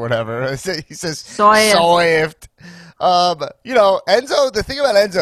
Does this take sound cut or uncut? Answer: uncut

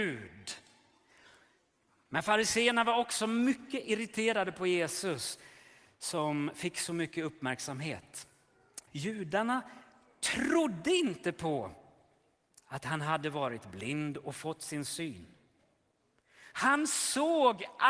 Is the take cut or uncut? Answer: cut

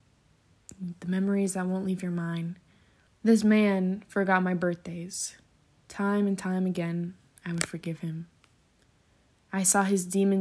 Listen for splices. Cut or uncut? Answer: cut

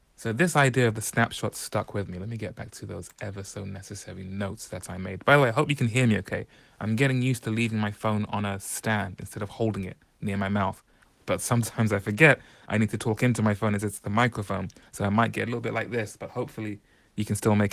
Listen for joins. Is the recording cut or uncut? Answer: uncut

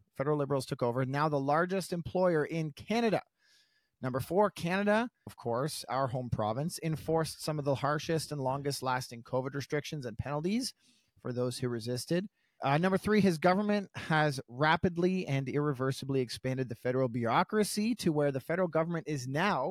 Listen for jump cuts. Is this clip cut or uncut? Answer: cut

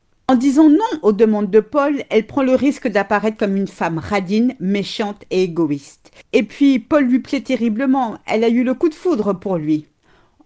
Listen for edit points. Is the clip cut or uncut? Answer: uncut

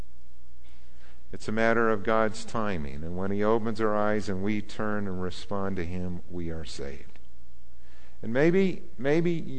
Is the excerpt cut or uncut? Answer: cut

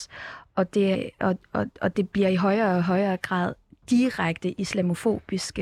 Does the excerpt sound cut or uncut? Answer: cut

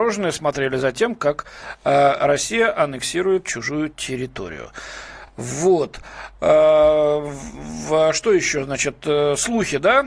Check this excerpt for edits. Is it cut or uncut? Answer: uncut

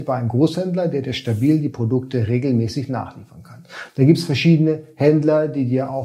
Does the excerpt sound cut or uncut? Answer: cut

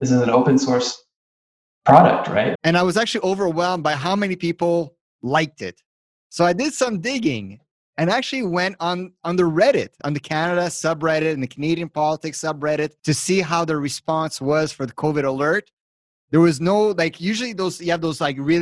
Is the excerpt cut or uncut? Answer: cut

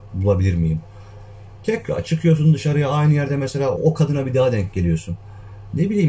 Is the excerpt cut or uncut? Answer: cut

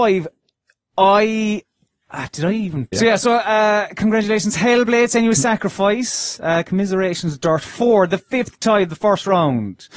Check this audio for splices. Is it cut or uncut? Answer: cut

